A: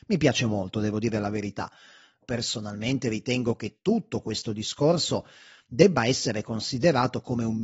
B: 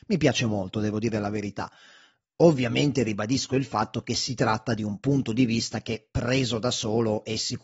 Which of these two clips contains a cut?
A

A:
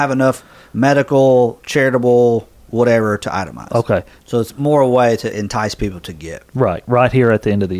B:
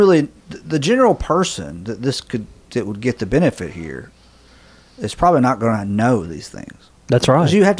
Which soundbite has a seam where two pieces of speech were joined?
A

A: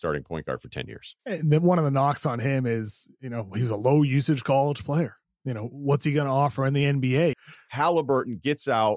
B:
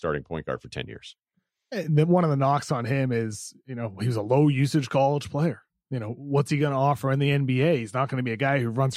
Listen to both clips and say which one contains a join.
A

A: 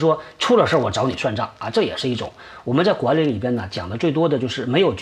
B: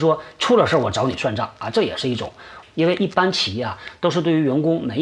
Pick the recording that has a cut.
B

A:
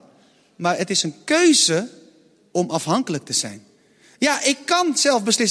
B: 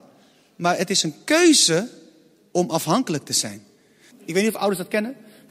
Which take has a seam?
B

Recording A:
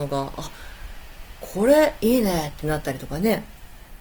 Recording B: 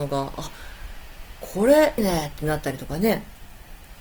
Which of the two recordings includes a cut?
B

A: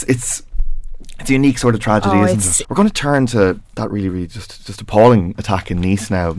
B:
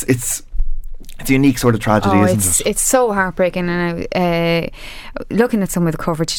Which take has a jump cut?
A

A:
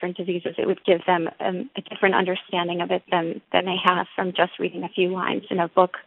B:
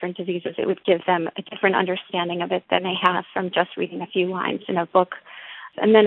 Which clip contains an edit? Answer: B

